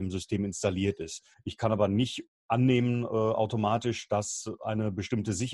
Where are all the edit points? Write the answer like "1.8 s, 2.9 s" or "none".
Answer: 1.3 s